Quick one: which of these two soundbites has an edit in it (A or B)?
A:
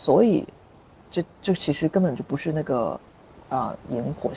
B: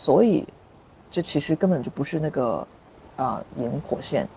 B